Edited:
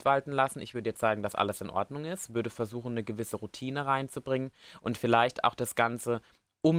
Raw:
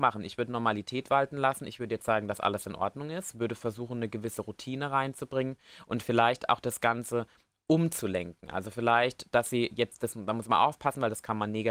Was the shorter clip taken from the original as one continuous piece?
yes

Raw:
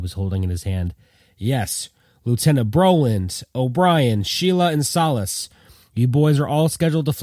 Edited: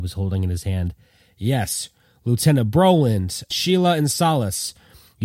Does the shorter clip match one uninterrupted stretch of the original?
no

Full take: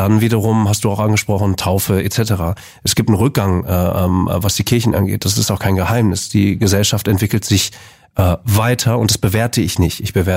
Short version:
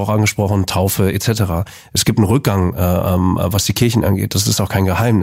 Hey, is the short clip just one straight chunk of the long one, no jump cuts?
yes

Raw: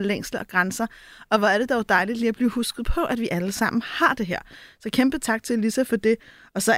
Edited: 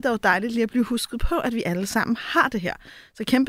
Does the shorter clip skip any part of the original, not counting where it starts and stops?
no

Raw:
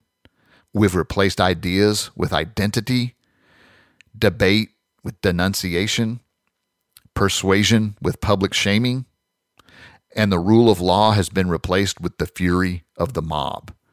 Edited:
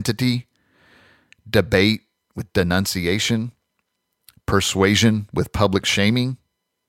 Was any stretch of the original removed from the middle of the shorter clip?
no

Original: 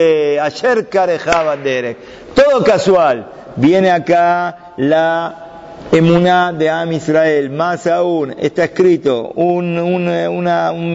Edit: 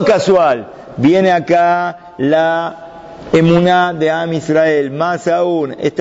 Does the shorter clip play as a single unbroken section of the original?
yes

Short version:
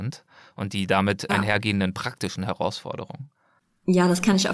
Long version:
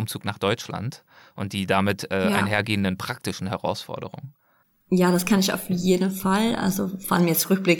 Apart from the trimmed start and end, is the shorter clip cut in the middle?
yes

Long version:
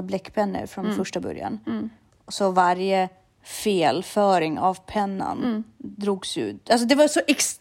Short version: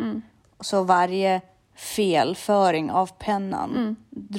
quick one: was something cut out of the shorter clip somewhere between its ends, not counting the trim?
no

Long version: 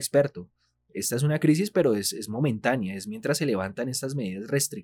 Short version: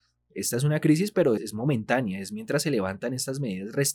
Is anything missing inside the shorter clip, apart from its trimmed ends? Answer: yes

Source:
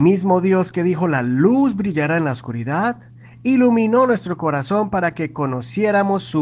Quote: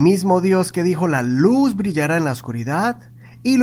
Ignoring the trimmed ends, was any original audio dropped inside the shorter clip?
no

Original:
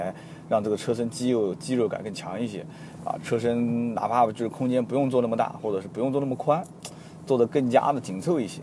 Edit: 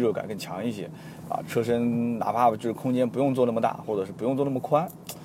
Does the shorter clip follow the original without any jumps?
yes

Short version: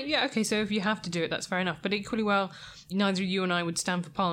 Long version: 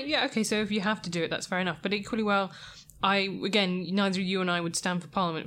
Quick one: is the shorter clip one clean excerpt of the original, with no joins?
no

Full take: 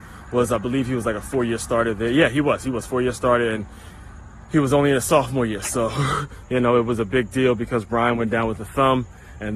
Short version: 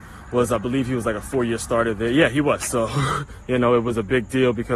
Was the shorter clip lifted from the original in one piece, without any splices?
no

